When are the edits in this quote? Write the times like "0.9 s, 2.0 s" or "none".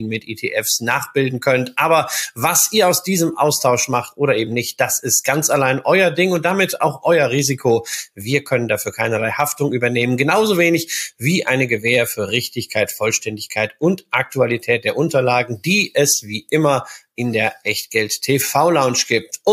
none